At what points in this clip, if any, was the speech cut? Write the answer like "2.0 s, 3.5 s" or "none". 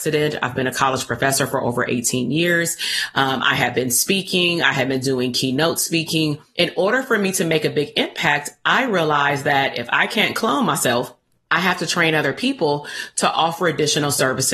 6.5 s